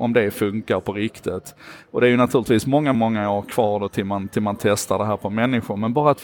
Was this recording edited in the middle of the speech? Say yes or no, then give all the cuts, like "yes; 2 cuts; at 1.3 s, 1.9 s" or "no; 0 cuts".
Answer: yes; 1 cut; at 2.9 s